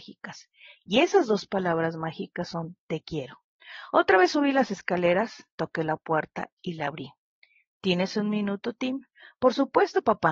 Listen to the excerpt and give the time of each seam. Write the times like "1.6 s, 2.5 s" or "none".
none

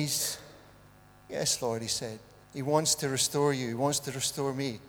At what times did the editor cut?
2.4 s

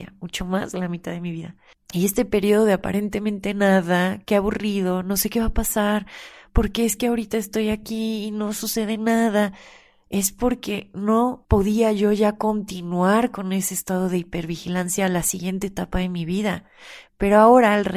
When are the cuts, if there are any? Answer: 17.0 s

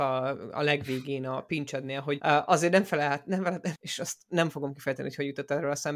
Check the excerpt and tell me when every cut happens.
2.2 s, 3.7 s

